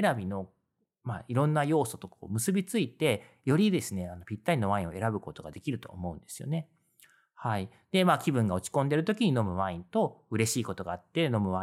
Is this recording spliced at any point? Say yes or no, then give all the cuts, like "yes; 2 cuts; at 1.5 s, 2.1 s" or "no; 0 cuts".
no; 0 cuts